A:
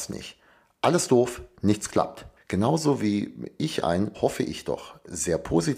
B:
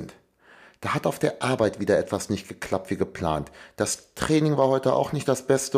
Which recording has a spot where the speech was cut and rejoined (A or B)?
A